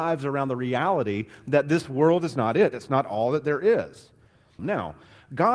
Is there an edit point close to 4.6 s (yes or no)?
yes